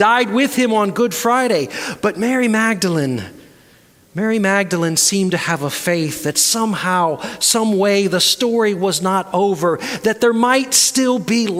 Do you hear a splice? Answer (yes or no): no